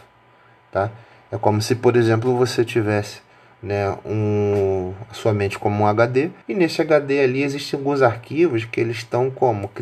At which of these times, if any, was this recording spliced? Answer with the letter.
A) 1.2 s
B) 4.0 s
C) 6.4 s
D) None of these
C